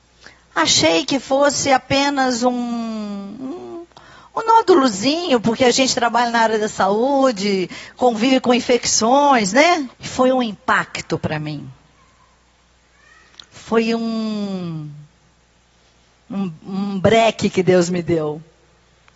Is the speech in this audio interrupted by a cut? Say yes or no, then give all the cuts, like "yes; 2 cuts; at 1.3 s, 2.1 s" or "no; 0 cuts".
yes; 1 cut; at 9.9 s